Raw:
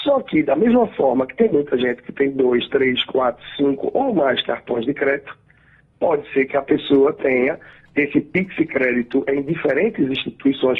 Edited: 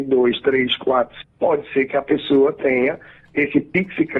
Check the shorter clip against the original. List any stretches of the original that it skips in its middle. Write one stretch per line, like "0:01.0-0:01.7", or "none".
0:03.5-0:05.8